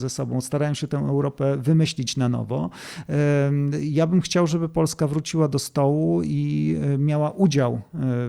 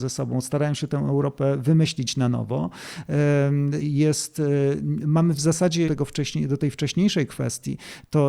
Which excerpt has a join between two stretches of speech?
second; 2 cuts; at 3.8 s, 5.9 s

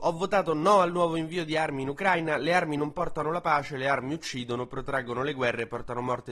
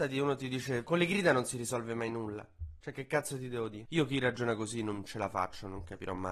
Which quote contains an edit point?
second; 2 cuts; at 2.8 s, 3.9 s

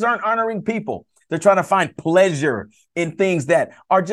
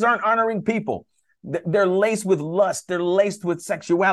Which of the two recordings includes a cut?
first; 1 cut; at 1.2 s

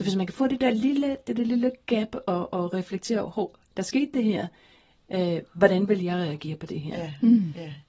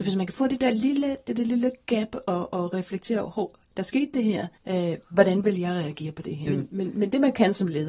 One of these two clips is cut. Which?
second; 2 cuts; at 4.6 s, 6.5 s

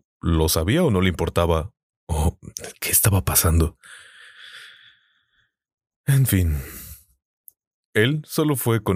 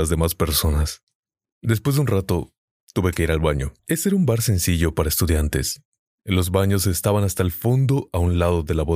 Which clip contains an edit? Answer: second; 2 cuts; at 3.8 s, 6.2 s

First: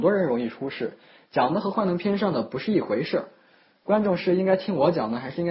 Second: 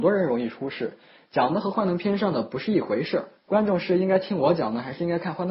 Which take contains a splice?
second; 1 cut; at 3.4 s

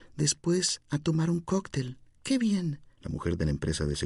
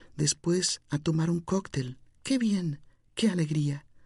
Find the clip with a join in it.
first; 1 cut; at 3.0 s

